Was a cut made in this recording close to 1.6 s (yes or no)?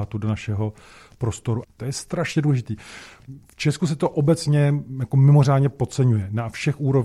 yes